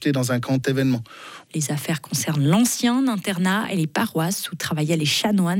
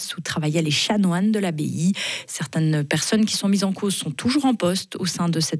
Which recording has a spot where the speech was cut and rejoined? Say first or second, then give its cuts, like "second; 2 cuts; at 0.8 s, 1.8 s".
first; 1 cut; at 1.5 s